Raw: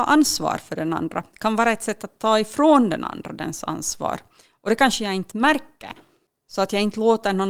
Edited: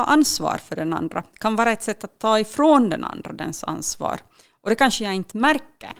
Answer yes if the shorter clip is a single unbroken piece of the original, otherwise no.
yes